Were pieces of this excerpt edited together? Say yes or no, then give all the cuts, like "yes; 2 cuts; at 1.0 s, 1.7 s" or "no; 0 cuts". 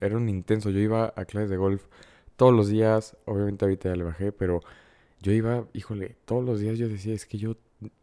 no; 0 cuts